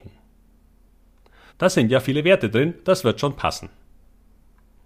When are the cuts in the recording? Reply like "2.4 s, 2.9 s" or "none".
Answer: 1.5 s